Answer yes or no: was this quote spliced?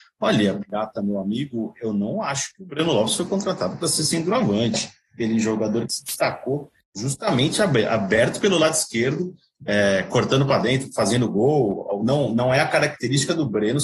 no